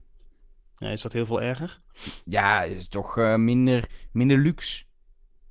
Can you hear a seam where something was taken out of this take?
no; 0 cuts

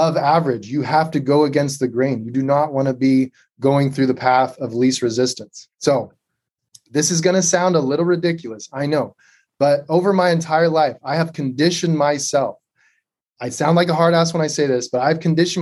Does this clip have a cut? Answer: no; 0 cuts

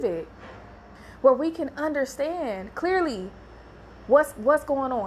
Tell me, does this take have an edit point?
no; 0 cuts

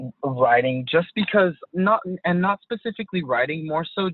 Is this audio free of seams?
no; 1 cut; at 1.7 s

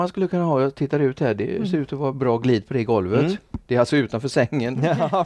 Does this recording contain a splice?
no; 0 cuts

